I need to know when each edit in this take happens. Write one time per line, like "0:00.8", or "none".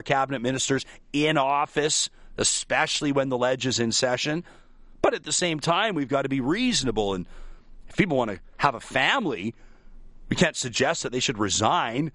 none

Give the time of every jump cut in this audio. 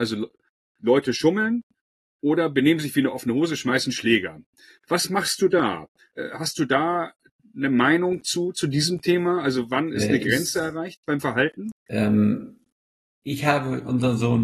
0:06.1
0:11.8

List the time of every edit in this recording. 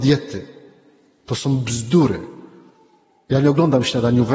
none

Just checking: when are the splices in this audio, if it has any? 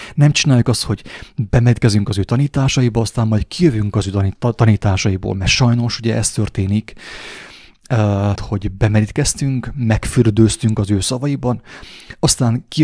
0:08.4

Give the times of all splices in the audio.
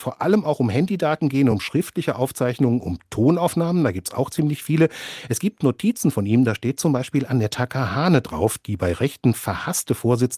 none

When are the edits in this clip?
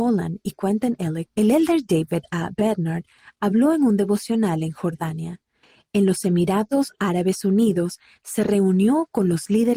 0:01.3

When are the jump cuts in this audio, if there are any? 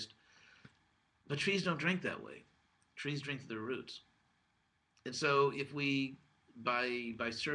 none

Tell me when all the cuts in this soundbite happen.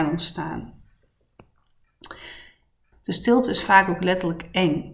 0:02.9

